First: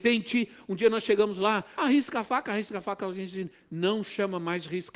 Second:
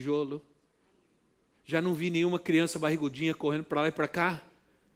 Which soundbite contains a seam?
first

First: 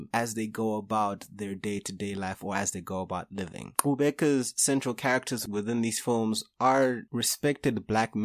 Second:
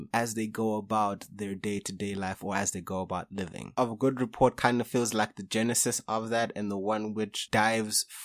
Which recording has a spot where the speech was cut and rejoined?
first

